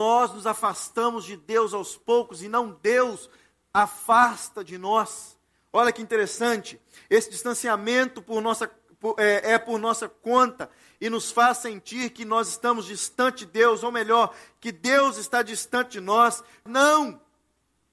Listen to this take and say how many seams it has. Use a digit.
1